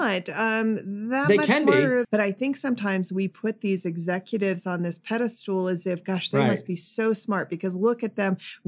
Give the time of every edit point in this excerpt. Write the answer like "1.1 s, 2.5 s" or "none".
2.0 s